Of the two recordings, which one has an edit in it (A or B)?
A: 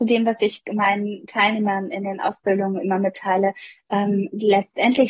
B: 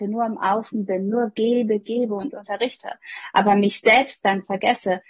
B